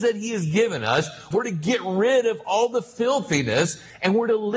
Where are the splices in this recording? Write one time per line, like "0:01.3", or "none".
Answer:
0:01.3